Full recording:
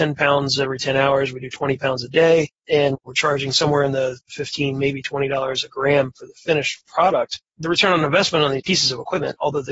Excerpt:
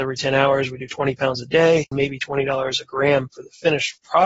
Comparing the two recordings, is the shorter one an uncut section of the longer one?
no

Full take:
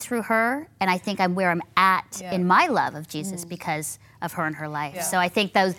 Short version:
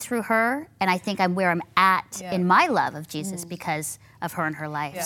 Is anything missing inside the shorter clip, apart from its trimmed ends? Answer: no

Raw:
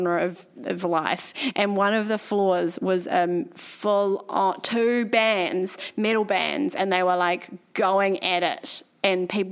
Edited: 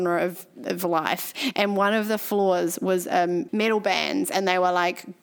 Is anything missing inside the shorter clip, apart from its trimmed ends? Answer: yes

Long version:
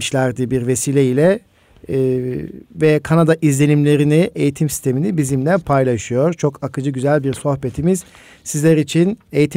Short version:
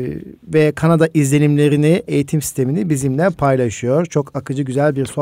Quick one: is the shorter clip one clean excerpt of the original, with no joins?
yes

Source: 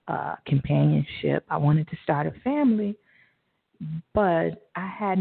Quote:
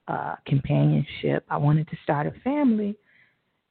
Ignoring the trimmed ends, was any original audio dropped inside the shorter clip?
no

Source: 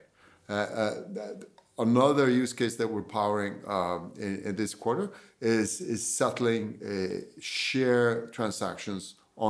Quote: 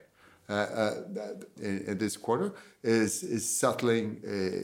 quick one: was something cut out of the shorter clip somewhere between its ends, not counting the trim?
yes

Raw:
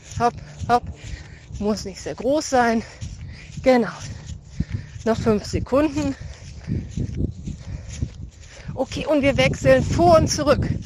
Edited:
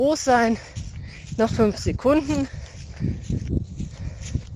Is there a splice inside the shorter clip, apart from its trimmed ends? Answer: yes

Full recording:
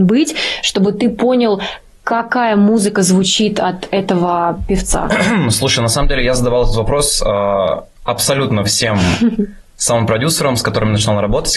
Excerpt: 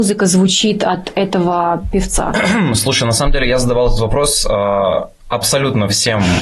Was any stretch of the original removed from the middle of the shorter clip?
no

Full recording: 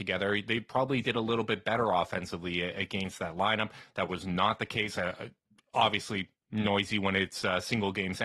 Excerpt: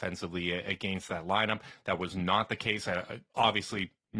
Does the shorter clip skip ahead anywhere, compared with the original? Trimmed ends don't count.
yes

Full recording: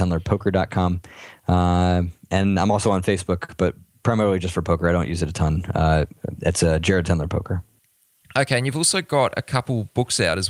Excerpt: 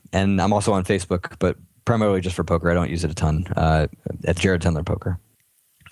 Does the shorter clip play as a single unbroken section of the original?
no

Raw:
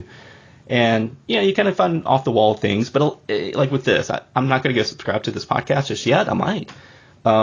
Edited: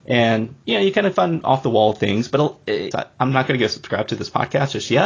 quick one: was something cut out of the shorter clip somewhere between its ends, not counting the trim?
yes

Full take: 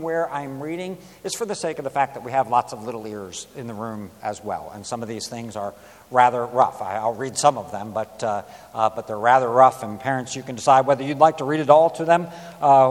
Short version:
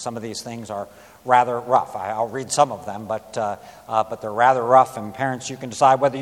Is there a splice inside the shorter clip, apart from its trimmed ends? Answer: no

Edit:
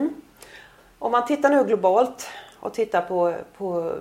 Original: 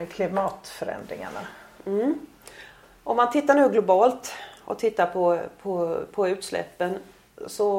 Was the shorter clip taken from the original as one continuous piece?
yes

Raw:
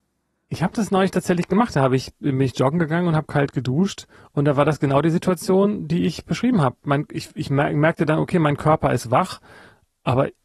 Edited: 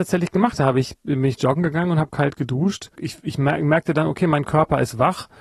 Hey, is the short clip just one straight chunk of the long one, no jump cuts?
no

